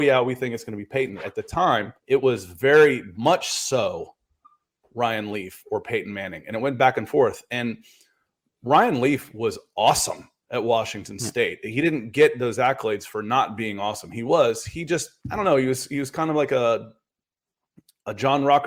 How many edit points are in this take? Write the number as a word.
two